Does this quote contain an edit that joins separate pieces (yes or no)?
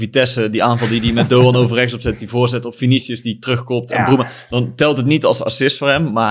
no